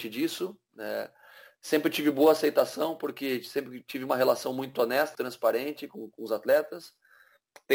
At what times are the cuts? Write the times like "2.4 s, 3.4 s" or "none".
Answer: 5.1 s